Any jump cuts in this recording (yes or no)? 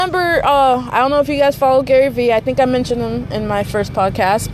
no